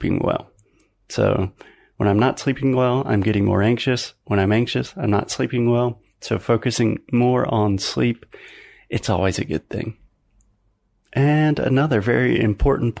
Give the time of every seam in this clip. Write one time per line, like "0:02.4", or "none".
none